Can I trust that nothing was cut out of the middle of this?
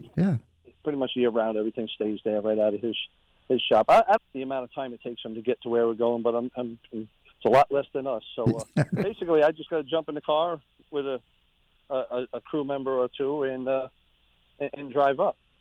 no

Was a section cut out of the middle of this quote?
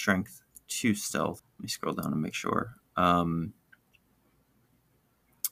yes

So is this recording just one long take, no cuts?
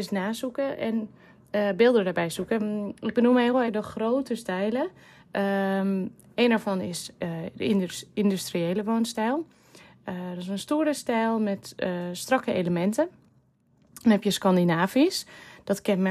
no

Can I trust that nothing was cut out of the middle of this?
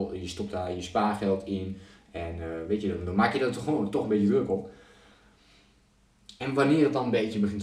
yes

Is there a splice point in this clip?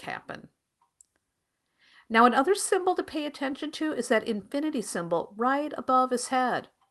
no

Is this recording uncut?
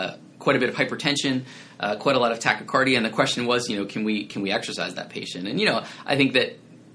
yes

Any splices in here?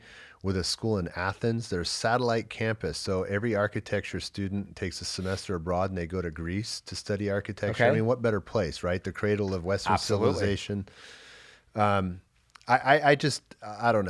no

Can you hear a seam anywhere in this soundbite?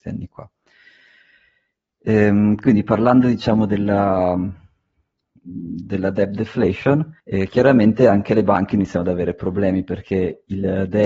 yes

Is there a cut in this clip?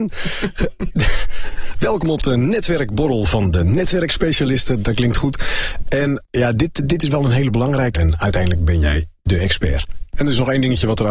yes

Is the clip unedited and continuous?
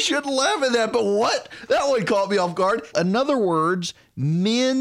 no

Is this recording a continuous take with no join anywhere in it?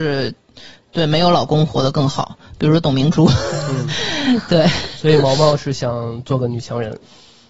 yes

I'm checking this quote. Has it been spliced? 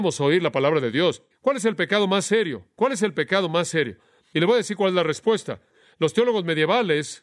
yes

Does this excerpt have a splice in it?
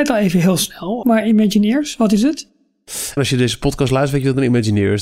yes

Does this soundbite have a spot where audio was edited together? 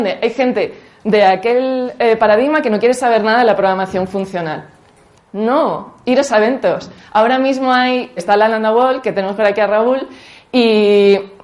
yes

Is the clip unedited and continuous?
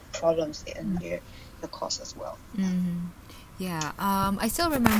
no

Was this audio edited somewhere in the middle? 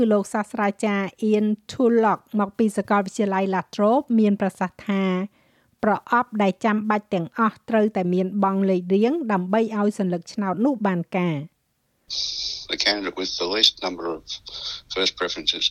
no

